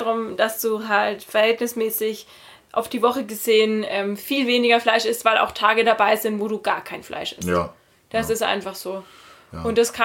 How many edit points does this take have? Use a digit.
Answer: 0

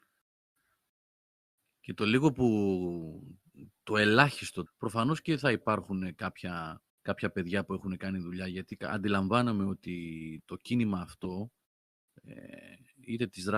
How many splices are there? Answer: 2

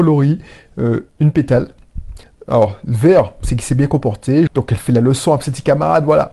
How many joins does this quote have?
1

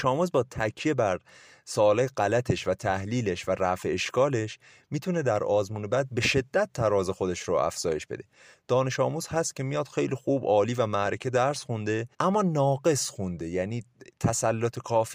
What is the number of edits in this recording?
1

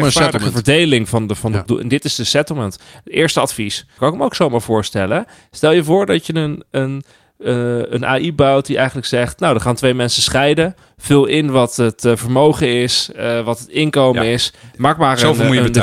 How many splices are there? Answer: 2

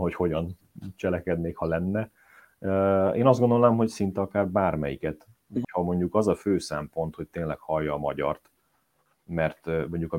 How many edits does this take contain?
1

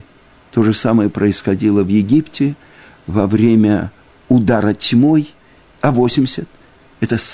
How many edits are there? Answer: 1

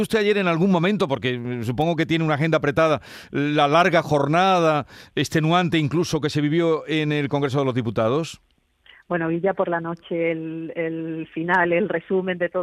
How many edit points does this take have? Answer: 0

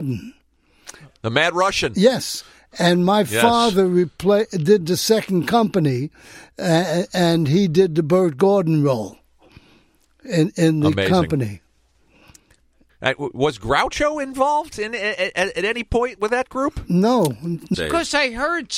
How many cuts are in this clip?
1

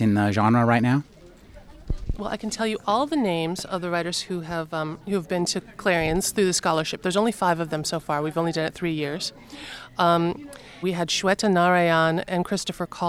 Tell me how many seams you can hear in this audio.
1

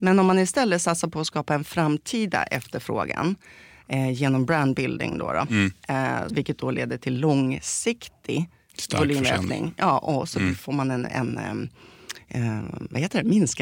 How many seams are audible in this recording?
1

